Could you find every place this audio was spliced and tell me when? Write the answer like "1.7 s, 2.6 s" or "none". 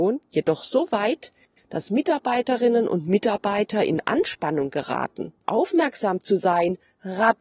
5.4 s